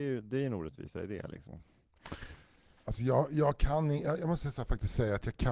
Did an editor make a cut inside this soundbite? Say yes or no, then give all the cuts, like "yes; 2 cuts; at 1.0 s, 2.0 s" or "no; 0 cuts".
no; 0 cuts